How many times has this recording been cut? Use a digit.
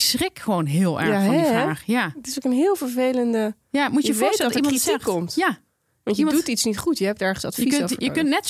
0